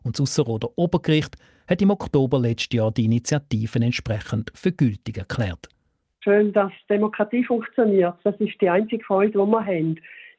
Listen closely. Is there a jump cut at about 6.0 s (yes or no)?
yes